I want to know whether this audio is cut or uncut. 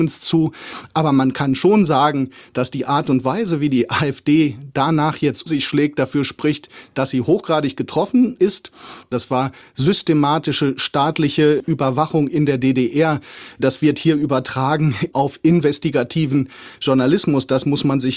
cut